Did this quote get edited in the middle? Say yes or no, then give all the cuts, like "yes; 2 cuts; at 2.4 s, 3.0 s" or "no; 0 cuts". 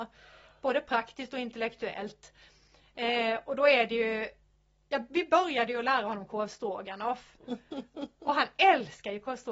no; 0 cuts